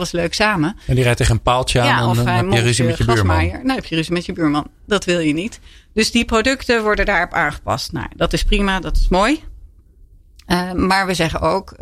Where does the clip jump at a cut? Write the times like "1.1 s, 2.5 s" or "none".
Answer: none